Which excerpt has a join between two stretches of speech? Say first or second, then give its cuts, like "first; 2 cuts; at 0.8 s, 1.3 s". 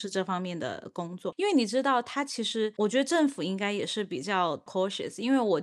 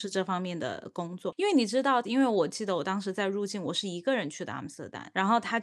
second; 1 cut; at 2.0 s